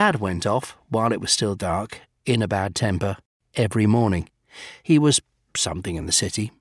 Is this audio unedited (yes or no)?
yes